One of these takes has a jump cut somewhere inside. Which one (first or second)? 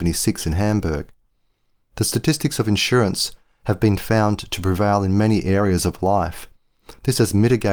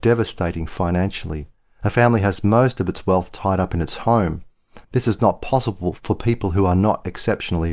second